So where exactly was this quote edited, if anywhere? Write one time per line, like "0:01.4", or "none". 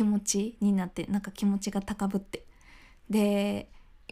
none